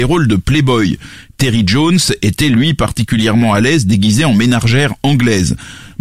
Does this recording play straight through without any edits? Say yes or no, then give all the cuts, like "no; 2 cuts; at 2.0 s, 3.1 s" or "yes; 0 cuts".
yes; 0 cuts